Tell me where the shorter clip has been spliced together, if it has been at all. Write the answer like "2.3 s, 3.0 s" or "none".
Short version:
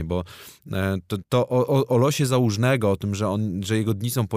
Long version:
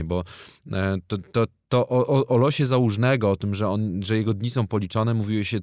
1.2 s